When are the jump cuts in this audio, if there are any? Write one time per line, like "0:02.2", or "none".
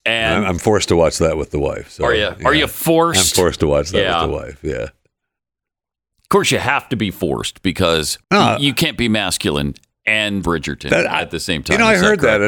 0:08.2
0:10.4